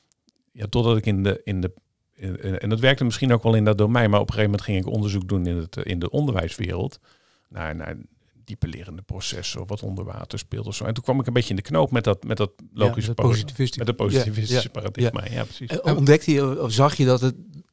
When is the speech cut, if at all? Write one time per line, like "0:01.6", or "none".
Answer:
none

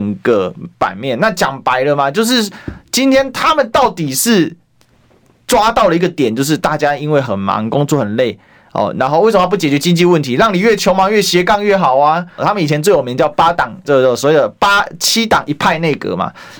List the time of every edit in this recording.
0:12.4
0:13.8

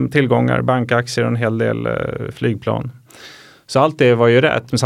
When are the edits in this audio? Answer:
none

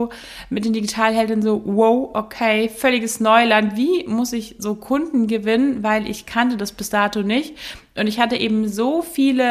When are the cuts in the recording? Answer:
none

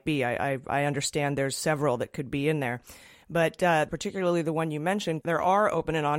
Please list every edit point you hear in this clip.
0:03.9
0:05.2

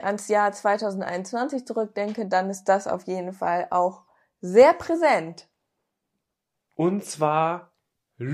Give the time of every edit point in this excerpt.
0:06.7

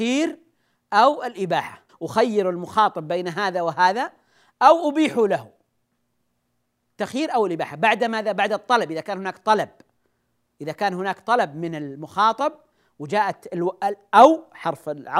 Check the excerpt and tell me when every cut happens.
0:01.9

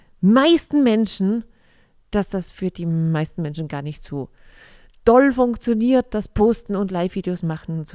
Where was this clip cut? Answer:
none

